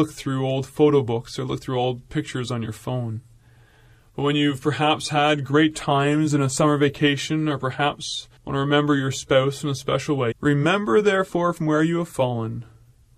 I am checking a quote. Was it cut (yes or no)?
yes